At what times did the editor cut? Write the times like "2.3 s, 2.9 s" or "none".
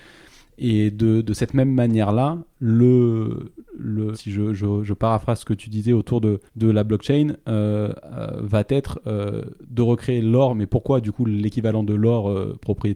4.1 s, 6.5 s